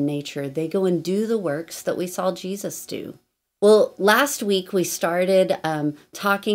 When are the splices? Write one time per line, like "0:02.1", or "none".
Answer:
0:03.4